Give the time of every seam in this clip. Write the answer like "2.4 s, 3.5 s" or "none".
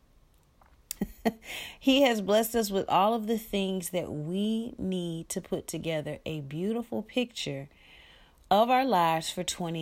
1.0 s